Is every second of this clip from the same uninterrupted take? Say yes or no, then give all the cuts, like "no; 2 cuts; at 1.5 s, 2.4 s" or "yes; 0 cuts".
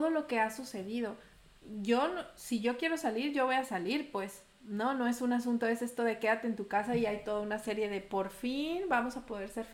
yes; 0 cuts